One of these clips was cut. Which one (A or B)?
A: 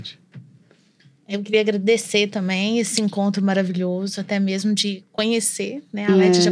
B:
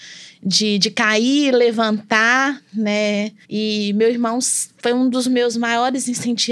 B